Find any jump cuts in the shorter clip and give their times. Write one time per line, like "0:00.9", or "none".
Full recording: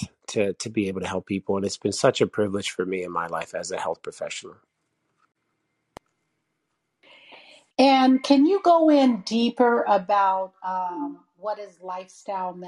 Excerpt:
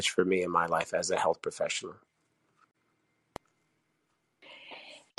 none